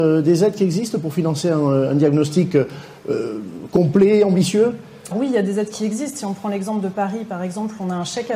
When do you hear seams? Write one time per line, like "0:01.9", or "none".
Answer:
0:05.1